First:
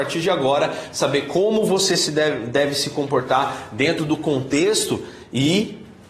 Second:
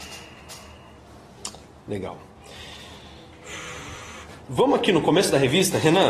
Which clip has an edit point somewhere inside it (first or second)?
second